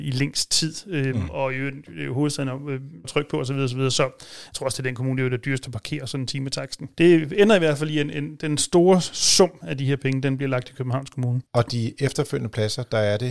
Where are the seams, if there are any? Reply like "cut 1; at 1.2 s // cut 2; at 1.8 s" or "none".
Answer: cut 1; at 3.0 s